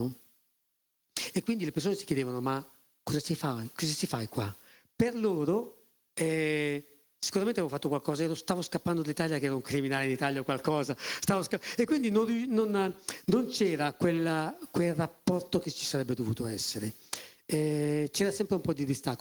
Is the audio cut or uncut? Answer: uncut